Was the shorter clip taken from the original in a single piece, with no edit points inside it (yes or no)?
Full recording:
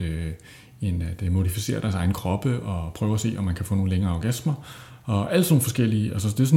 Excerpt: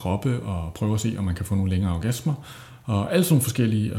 yes